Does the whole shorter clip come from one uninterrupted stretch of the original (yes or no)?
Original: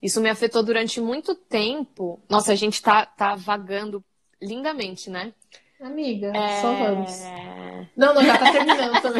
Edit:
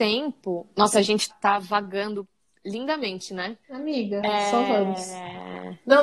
no